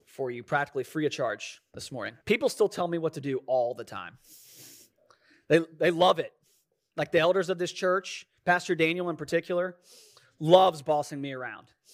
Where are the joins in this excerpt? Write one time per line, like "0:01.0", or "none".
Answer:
0:02.2